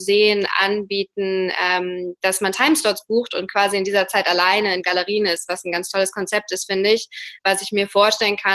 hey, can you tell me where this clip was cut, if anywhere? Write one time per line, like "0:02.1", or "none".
none